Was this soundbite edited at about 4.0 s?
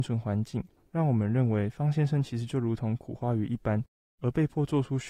yes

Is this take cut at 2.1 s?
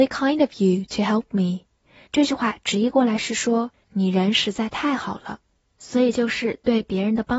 yes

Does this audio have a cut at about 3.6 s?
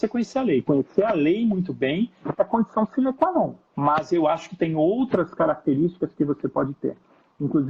yes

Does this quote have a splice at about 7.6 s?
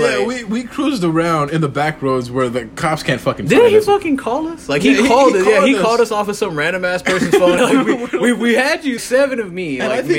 yes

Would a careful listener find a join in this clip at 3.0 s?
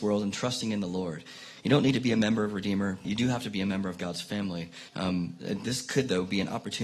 yes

